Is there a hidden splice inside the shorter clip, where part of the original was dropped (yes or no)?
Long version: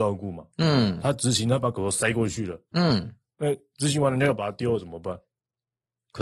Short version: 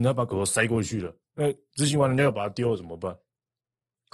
yes